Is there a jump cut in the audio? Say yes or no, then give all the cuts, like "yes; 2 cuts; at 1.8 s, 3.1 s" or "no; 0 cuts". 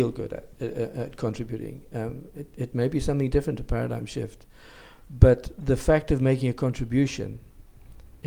no; 0 cuts